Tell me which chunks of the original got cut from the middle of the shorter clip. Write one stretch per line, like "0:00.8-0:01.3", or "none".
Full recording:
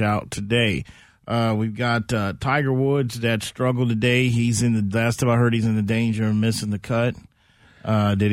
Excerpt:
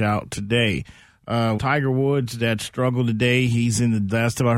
0:01.6-0:02.4